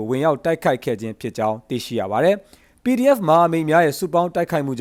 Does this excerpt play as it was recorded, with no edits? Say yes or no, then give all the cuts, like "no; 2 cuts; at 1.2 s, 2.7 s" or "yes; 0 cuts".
yes; 0 cuts